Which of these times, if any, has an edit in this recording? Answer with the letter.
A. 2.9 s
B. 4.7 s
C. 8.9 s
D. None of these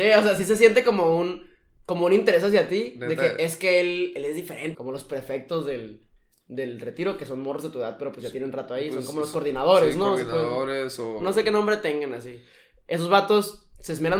B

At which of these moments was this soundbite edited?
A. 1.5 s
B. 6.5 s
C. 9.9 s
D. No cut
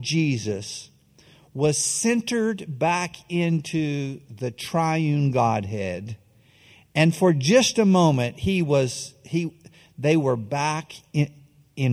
D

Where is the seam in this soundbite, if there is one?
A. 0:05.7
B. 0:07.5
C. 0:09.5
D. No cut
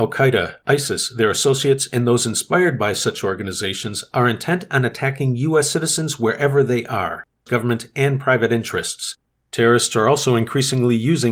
B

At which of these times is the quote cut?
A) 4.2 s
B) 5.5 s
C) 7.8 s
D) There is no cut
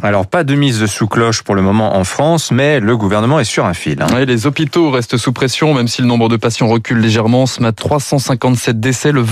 C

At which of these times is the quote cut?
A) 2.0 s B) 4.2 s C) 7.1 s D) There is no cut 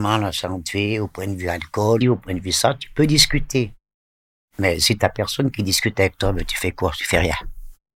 A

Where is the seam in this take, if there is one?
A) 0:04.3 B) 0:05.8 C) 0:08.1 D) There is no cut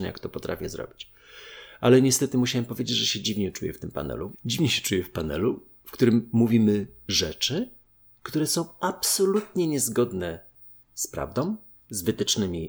A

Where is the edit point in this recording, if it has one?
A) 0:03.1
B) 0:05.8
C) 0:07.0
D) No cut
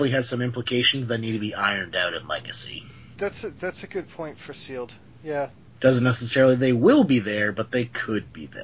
B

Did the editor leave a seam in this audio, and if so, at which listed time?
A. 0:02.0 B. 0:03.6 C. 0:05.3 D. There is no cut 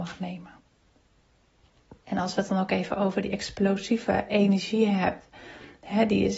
A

